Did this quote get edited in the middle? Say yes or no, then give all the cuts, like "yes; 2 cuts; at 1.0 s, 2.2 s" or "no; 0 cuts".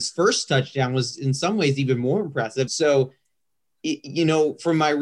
yes; 1 cut; at 2.7 s